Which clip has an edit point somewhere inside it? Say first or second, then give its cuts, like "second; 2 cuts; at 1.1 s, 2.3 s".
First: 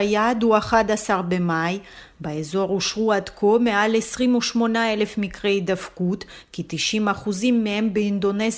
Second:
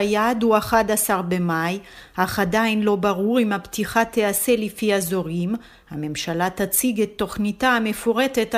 first; 1 cut; at 2.1 s